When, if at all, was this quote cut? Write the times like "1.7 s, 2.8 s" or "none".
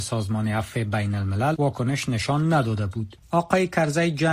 3.3 s